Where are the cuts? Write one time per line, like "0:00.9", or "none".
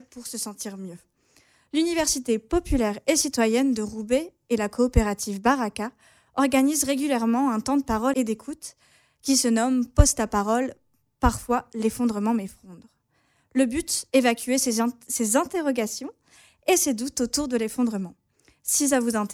none